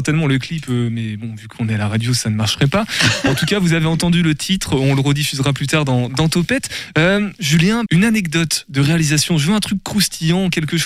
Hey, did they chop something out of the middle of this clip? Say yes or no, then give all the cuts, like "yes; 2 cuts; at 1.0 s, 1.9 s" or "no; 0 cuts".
yes; 1 cut; at 7.9 s